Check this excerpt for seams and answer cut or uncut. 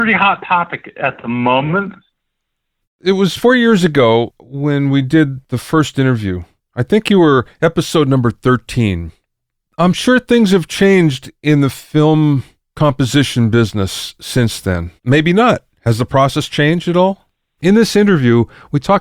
cut